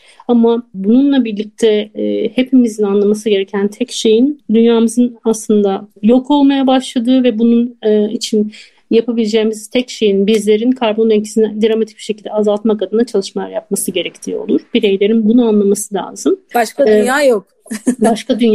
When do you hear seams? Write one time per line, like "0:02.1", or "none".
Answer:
0:15.2